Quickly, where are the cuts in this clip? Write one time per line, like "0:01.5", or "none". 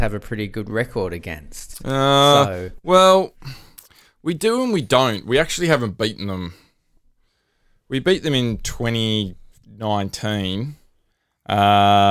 none